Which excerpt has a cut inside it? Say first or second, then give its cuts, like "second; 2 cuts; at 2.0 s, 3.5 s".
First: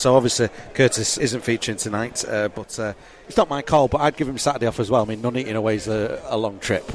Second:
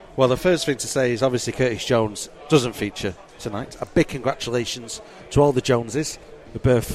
first; 1 cut; at 1.2 s